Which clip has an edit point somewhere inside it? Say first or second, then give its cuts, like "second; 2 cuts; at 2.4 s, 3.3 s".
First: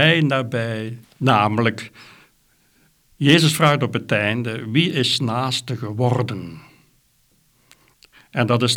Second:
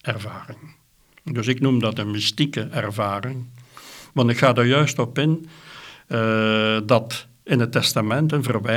first; 1 cut; at 1.0 s